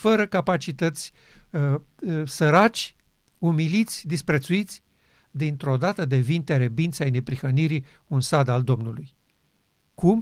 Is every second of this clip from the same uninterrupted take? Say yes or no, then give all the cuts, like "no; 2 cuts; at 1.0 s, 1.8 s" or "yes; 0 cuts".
yes; 0 cuts